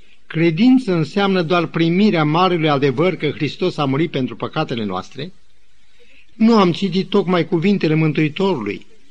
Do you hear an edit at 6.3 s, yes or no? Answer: yes